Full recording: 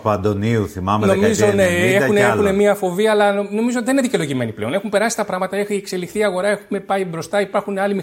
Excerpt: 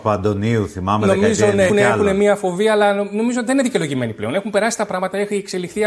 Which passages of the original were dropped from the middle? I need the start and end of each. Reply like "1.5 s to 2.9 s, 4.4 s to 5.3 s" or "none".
1.7 s to 2.1 s